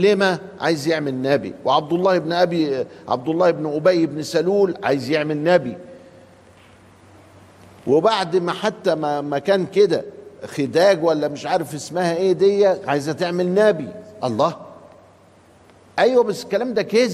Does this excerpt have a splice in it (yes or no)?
no